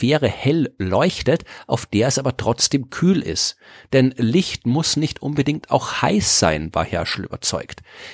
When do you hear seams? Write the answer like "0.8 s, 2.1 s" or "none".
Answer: none